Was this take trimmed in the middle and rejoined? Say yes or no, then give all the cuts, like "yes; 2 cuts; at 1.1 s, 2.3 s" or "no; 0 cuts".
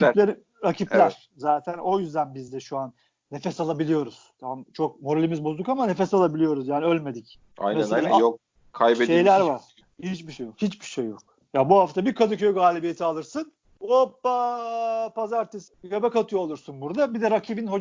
no; 0 cuts